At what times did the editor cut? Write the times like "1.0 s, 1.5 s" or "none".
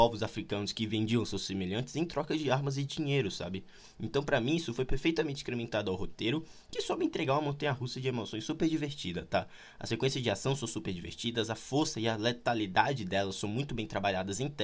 none

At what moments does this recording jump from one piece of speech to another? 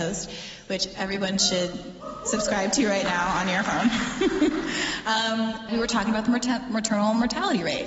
5.7 s

